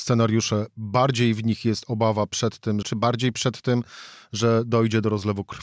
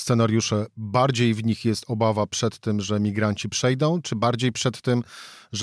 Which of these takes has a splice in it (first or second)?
first